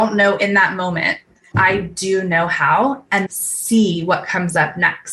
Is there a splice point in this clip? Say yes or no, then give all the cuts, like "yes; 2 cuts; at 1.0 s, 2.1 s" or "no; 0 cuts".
yes; 2 cuts; at 1.5 s, 3.3 s